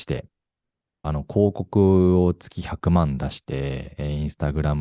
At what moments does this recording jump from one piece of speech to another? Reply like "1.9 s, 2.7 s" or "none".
1.0 s